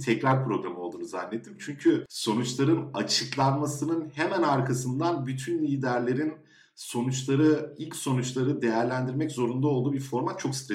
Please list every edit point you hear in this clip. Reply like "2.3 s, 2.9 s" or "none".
none